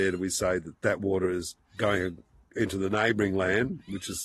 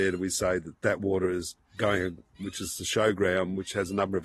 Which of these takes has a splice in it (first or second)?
second